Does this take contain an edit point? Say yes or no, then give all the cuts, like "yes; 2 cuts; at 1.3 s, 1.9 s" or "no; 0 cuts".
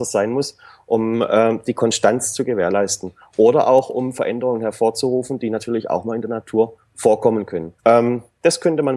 yes; 1 cut; at 7.8 s